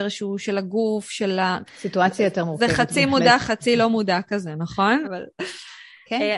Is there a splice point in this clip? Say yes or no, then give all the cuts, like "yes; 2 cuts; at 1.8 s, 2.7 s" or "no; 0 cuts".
yes; 2 cuts; at 1.7 s, 5.0 s